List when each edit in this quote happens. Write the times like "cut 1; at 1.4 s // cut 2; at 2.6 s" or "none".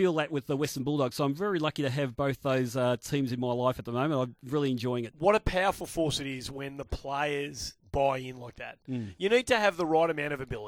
none